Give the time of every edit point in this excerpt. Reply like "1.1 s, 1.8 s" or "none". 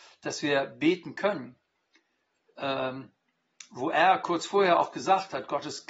none